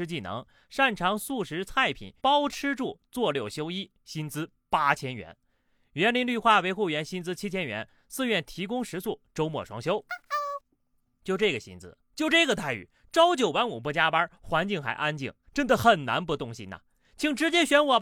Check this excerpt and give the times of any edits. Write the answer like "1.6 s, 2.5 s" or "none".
2.2 s